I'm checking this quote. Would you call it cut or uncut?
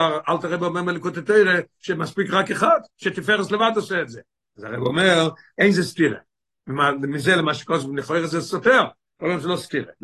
uncut